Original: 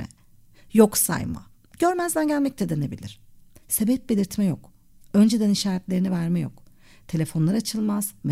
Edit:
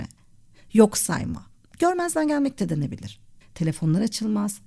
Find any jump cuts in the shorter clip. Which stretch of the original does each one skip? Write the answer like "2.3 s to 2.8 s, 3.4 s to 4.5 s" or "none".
3.4 s to 6.9 s